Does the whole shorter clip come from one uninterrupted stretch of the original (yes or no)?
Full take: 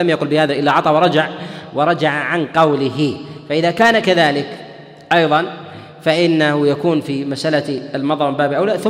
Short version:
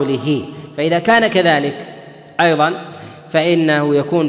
yes